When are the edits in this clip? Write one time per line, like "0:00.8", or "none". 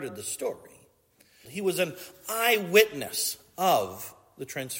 0:01.4